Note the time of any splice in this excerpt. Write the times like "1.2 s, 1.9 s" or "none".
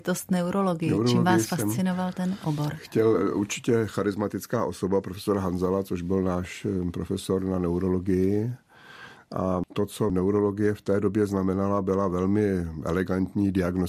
none